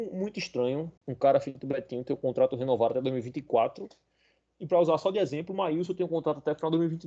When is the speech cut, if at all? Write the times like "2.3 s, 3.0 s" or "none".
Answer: 1.0 s